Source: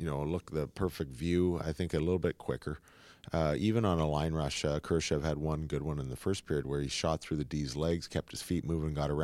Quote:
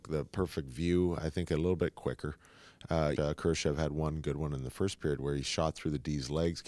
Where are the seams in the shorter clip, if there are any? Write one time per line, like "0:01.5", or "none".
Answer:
0:03.2

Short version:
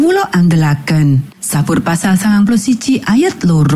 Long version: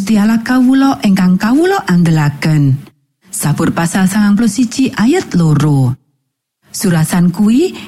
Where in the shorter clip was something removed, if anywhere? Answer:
0:01.3

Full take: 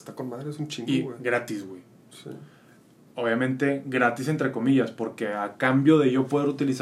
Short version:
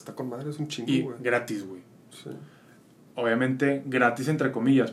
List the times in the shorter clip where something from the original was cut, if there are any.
none

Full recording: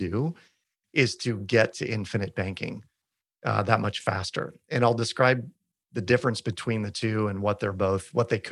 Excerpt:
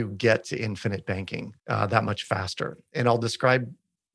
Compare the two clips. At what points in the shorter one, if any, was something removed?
0:01.6

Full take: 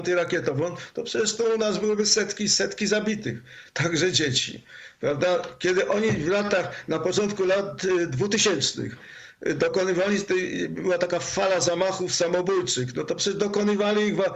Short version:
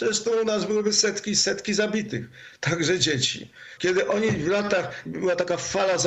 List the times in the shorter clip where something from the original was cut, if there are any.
0:03.8
0:05.1

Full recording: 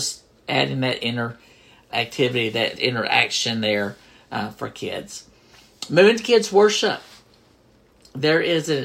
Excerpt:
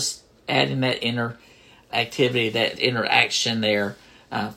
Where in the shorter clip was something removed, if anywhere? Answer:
none

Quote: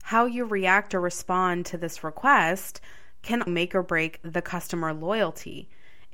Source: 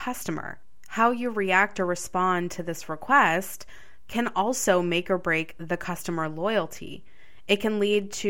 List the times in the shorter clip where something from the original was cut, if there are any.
0:03.5

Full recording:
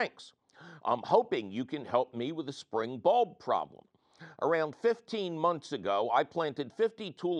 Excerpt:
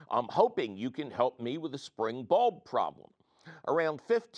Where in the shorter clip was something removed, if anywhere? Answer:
none

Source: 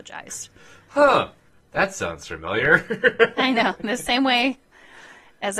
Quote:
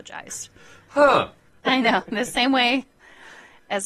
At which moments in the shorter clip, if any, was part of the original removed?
0:01.6

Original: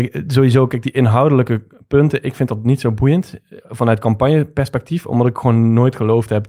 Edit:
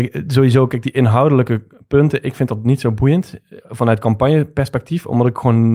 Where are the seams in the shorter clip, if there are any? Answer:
none

